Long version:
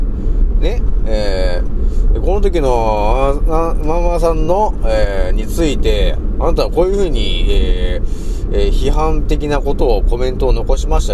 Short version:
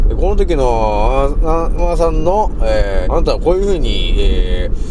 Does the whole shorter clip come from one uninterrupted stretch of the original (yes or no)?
no